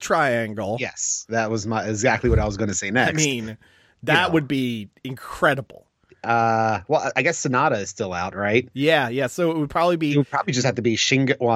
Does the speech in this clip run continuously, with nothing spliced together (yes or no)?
no